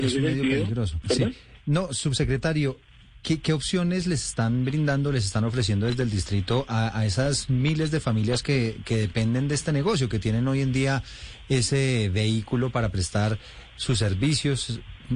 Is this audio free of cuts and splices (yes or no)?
no